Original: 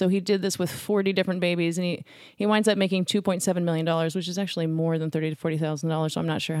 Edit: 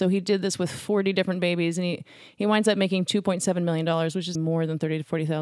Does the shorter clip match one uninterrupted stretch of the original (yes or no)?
no